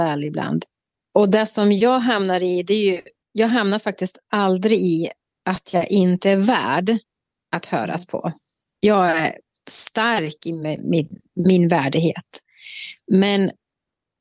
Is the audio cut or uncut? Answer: uncut